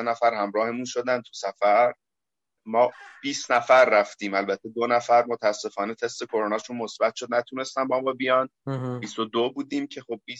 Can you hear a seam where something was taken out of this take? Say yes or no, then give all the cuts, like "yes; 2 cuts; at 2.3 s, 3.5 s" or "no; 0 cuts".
no; 0 cuts